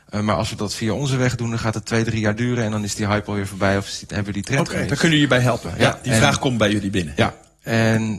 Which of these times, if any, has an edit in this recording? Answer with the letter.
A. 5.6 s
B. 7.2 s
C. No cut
A